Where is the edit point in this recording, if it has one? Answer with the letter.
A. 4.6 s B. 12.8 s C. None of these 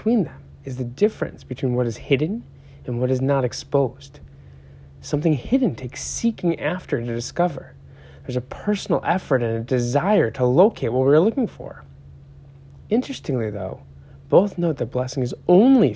B